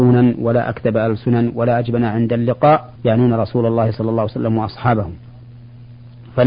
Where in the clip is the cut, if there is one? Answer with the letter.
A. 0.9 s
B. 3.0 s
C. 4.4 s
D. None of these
B